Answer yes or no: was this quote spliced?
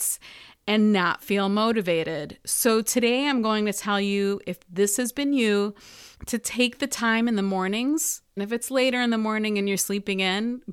yes